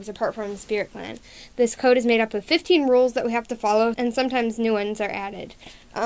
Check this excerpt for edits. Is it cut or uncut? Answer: cut